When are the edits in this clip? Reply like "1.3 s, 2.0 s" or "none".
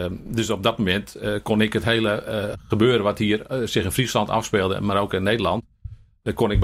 none